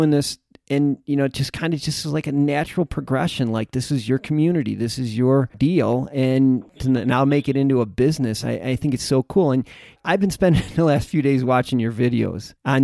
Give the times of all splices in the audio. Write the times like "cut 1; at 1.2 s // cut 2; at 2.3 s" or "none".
none